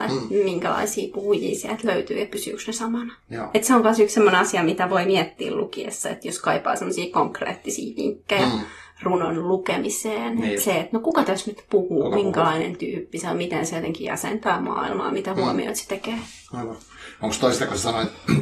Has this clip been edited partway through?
no; 0 cuts

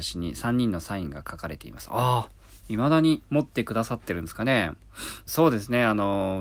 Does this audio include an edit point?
yes; 1 cut; at 5.3 s

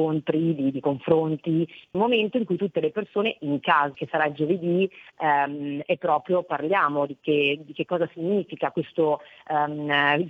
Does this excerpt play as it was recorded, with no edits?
no; 2 cuts; at 1.9 s, 3.9 s

